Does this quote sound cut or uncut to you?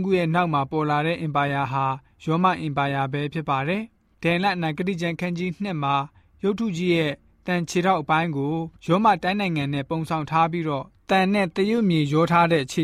cut